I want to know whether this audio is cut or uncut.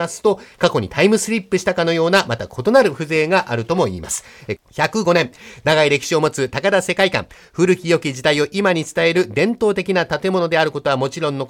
cut